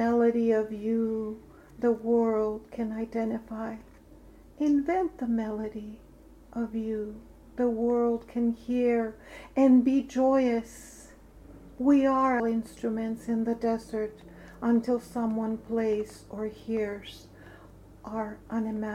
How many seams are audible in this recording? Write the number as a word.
one